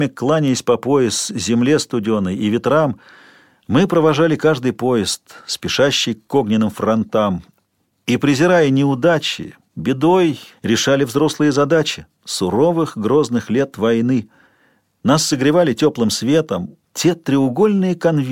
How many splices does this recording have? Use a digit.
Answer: 2